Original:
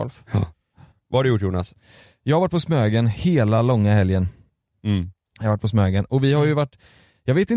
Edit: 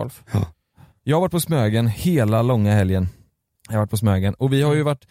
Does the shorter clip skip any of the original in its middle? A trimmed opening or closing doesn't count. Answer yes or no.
yes